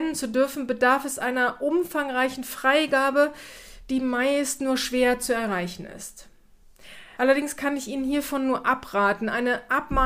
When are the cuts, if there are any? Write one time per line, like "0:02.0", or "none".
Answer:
0:07.2